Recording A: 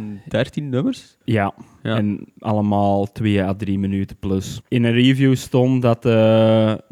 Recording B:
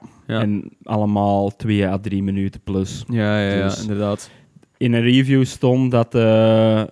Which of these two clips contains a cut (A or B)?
A